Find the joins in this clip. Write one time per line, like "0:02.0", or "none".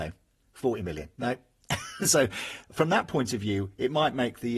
none